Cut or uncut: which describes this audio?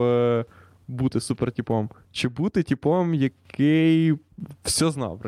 uncut